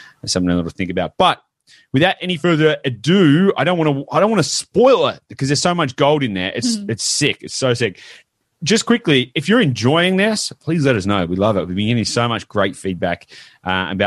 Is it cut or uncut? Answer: uncut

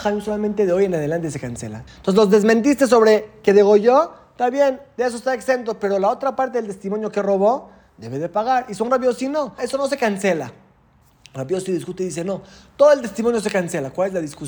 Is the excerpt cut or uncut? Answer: cut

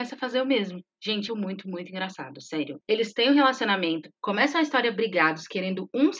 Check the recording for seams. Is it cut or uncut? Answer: cut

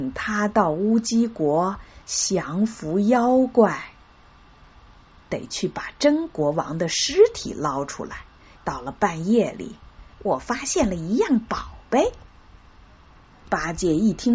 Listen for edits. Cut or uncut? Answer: cut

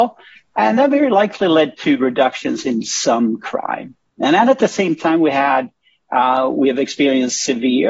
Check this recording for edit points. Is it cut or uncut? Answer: uncut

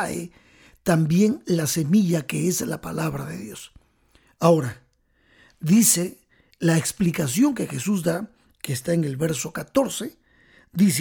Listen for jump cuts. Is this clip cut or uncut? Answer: uncut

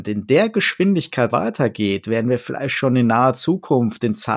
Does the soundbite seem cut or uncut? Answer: cut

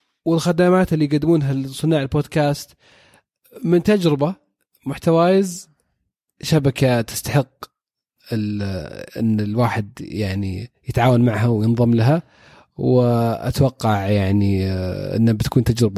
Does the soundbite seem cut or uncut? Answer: uncut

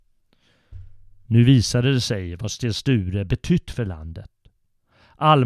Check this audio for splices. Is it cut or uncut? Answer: uncut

